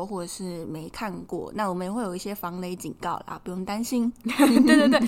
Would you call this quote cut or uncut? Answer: uncut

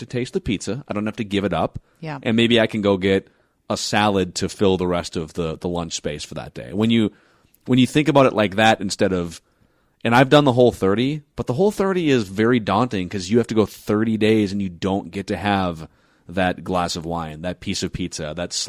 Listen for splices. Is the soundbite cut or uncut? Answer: uncut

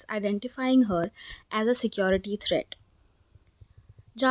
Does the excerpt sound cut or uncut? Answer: uncut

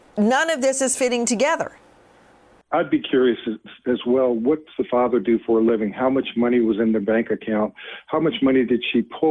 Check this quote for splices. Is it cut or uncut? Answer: uncut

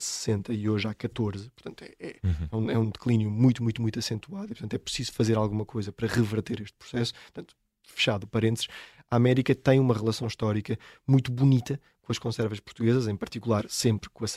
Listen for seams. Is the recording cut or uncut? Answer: uncut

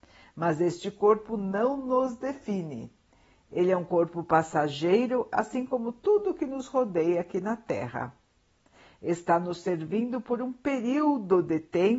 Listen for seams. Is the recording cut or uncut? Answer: uncut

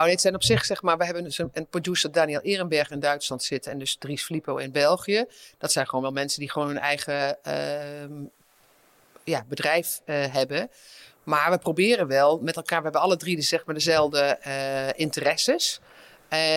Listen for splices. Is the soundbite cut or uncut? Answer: uncut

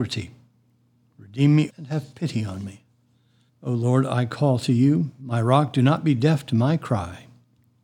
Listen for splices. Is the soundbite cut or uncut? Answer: cut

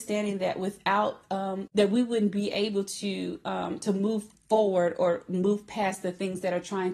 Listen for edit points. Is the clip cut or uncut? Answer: cut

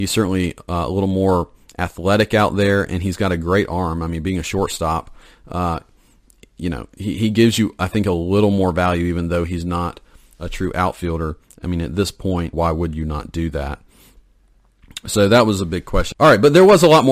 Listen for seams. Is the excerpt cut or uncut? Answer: cut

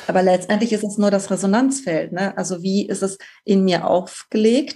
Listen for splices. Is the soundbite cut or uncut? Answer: uncut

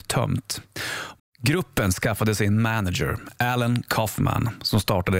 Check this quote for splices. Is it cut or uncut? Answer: cut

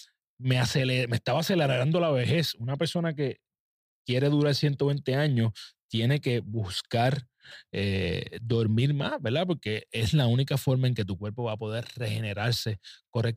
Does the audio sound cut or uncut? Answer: uncut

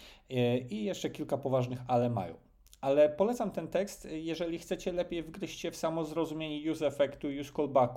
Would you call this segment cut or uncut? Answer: uncut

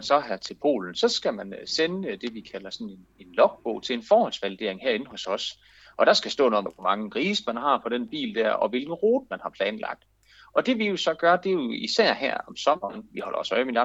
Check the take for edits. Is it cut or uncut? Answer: cut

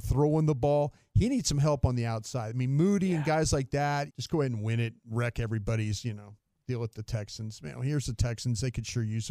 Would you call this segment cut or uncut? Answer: cut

